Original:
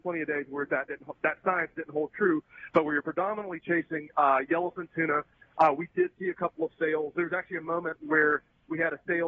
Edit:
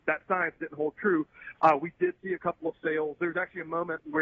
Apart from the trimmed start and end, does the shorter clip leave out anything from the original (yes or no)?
yes